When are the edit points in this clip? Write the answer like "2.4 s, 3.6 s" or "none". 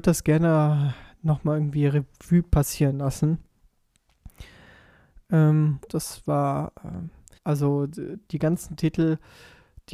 5.9 s, 7.3 s